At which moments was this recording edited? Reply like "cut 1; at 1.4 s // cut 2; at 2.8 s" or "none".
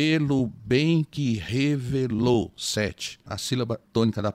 cut 1; at 3.3 s